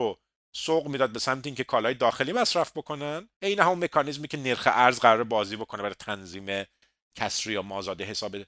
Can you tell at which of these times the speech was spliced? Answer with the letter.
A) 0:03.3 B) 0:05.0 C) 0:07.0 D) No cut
A